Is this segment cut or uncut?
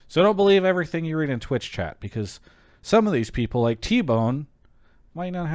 uncut